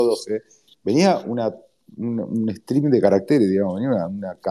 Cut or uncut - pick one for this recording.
uncut